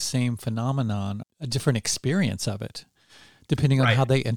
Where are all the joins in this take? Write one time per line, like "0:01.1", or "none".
0:01.2